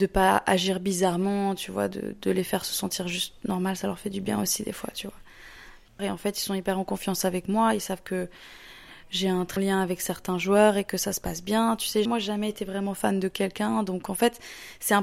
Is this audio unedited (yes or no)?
no